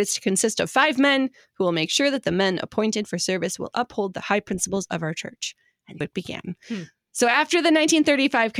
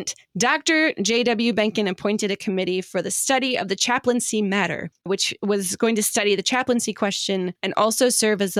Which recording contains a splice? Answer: first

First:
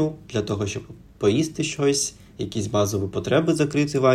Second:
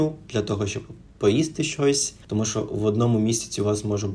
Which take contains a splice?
second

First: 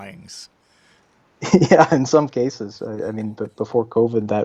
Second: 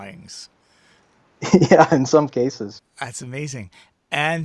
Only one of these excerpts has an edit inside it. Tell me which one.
second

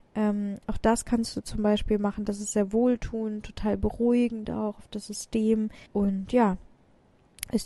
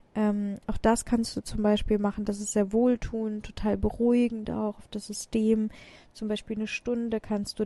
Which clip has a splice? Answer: first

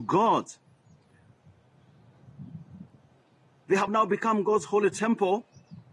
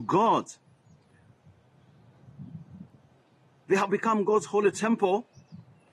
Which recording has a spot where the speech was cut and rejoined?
second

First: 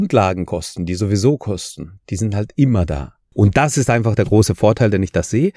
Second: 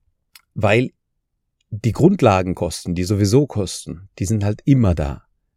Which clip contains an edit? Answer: first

